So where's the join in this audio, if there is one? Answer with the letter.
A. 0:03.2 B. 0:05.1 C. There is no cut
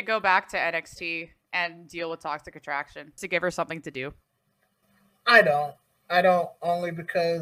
A